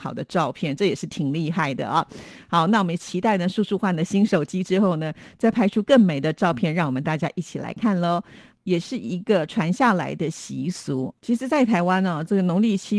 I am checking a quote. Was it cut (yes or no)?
yes